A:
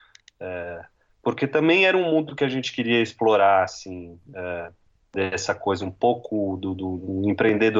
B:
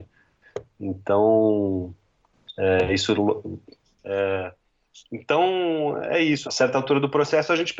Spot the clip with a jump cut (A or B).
B